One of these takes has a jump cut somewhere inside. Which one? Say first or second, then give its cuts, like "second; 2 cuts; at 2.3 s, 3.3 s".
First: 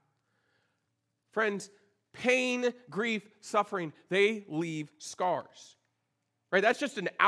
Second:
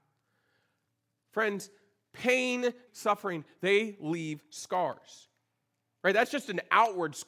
second; 1 cut; at 2.9 s